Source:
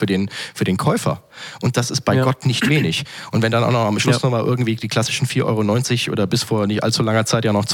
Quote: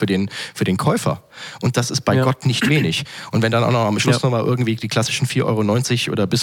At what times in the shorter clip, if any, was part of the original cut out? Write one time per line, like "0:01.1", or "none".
none